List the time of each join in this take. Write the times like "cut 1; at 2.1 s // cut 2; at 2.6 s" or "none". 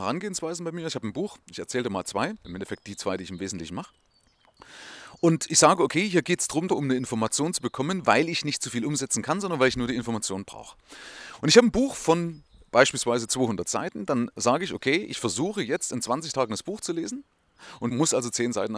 cut 1; at 6.7 s